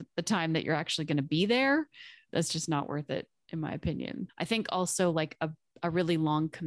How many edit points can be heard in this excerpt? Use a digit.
2